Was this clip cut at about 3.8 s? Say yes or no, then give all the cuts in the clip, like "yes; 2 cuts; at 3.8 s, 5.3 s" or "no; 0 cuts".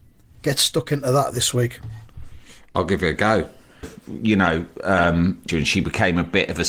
yes; 2 cuts; at 3.8 s, 5.5 s